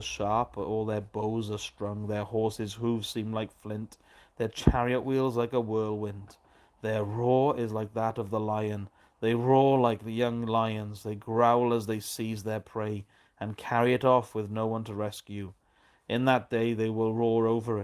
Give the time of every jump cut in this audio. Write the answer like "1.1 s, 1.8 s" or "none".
none